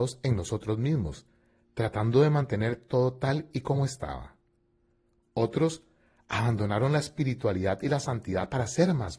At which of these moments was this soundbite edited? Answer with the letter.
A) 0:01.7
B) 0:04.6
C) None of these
C